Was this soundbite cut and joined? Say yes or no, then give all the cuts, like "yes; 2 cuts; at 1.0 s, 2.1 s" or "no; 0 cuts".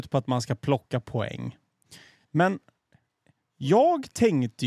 yes; 1 cut; at 2.2 s